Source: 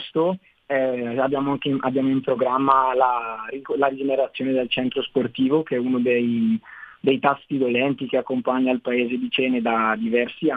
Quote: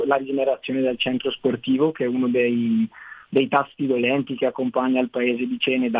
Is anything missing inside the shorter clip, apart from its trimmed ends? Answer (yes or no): no